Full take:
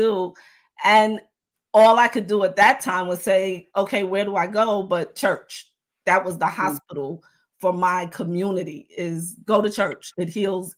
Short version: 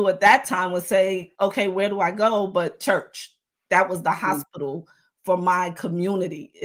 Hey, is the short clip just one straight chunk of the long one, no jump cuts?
yes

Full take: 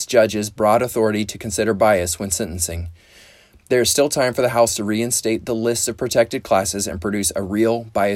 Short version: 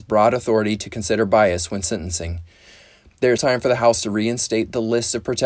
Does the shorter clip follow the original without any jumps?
no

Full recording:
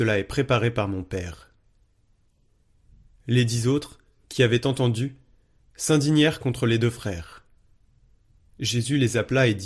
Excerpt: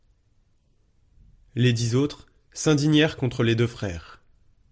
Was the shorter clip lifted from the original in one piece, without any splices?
no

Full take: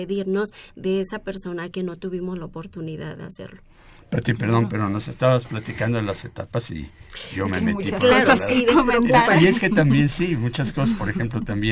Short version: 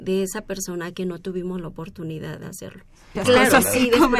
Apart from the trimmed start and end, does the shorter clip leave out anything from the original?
yes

